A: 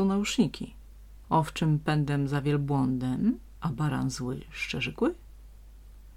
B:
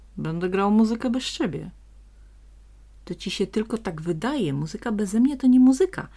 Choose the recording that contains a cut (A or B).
A